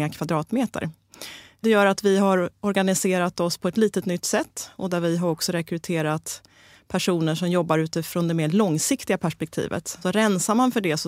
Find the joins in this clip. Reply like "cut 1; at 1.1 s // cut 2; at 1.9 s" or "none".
cut 1; at 10.0 s